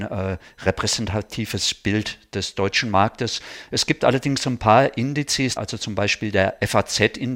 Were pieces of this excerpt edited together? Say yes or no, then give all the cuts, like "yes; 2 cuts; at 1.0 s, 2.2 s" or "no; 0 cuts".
yes; 1 cut; at 5.6 s